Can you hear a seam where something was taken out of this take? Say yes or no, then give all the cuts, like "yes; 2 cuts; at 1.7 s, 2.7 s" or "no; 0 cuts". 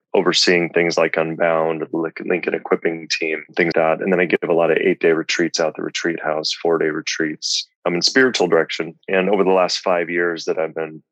yes; 2 cuts; at 3.7 s, 9.0 s